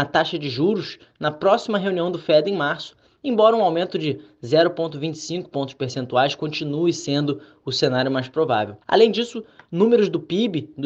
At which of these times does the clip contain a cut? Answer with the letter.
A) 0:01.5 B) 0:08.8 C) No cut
B